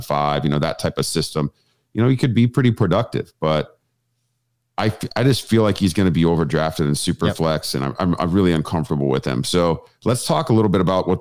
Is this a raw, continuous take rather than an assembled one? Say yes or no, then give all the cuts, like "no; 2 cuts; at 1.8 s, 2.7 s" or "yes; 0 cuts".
yes; 0 cuts